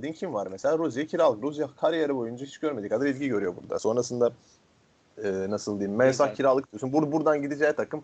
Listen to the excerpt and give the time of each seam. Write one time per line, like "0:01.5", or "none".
none